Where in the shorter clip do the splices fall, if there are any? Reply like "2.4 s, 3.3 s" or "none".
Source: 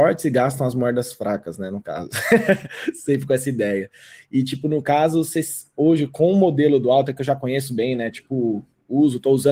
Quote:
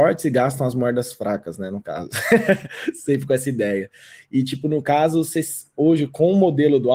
none

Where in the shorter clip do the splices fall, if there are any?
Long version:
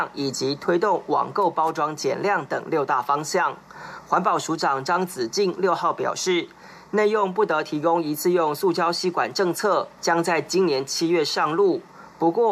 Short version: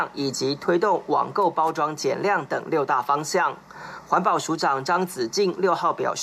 none

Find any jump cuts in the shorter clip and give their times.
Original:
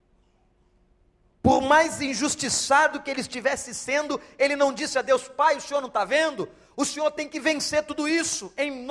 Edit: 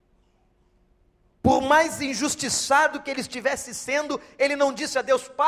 none

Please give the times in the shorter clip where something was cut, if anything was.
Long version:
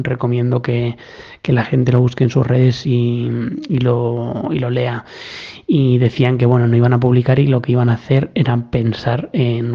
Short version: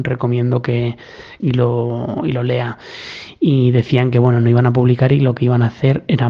1.4 s

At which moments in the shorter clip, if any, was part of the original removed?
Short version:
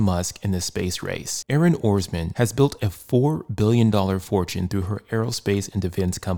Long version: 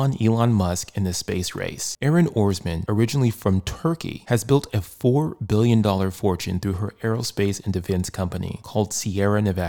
2.3 s

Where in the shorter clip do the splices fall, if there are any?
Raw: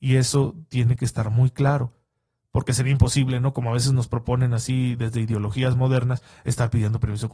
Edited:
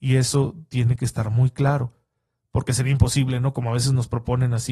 none

